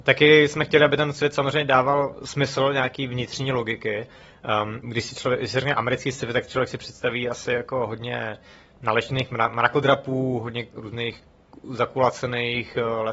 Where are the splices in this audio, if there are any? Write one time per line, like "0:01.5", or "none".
0:04.8

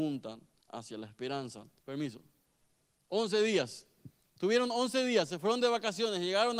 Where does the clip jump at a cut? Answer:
0:01.8

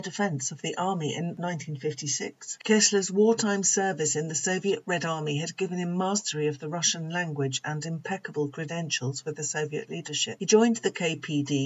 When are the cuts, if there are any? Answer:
0:10.4

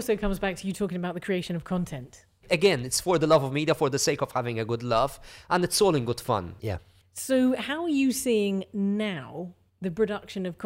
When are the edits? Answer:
0:02.4
0:06.6

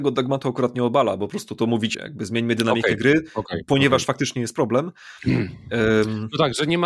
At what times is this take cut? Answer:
0:01.9

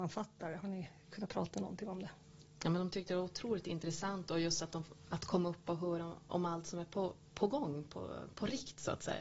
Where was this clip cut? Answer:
none

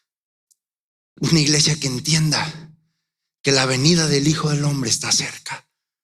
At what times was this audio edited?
0:01.2

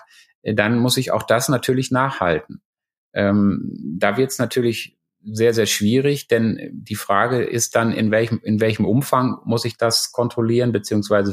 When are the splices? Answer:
none

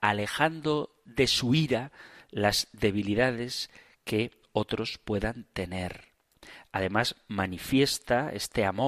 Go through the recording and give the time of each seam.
none

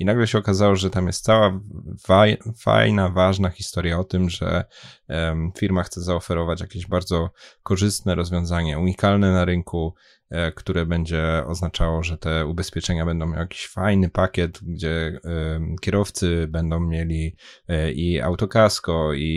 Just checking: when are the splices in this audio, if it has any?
none

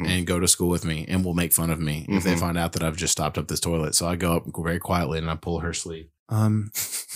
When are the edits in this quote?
0:06.2

